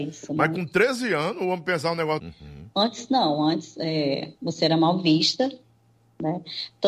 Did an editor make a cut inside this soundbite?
yes; 1 cut; at 2.2 s

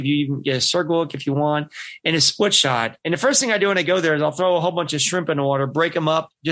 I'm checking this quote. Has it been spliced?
yes; 1 cut; at 3.0 s

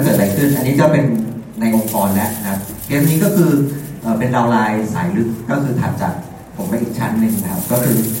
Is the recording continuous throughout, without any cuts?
yes; 0 cuts

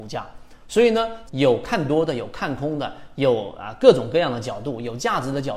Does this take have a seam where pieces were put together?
yes; 1 cut; at 1.3 s

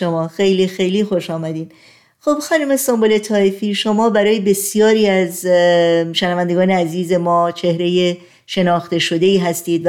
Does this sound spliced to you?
no; 0 cuts

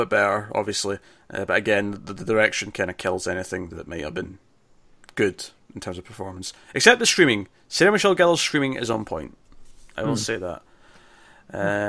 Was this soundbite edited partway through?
no; 0 cuts

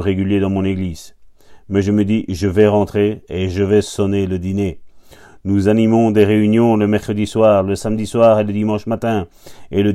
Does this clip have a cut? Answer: no; 0 cuts

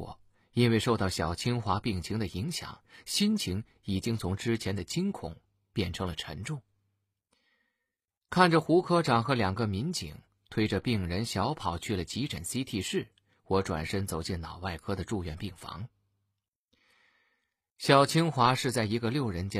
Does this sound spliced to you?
no; 0 cuts

